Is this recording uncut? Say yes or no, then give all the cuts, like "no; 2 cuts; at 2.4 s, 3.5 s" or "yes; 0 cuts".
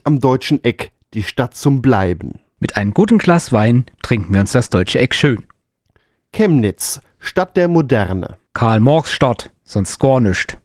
yes; 0 cuts